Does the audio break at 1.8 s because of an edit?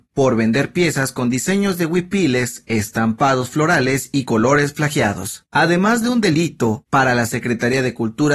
no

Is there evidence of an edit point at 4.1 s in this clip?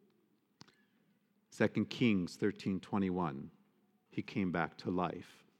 yes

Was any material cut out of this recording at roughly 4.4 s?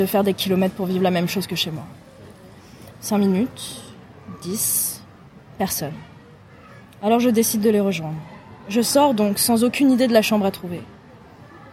no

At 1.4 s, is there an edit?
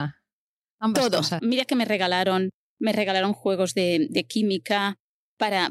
yes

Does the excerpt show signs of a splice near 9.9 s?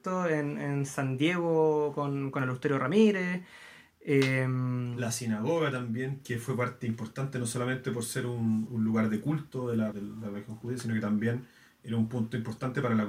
yes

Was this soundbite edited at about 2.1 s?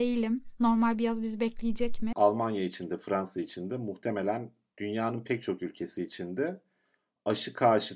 yes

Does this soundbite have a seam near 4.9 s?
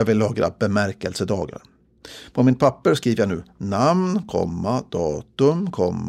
no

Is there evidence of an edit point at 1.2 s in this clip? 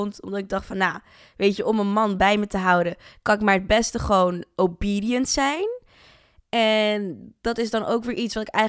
no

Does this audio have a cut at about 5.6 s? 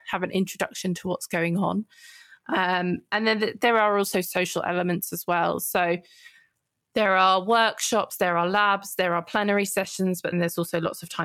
no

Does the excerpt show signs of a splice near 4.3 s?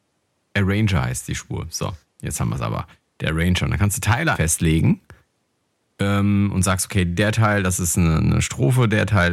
yes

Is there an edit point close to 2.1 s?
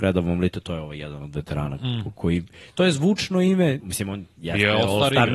yes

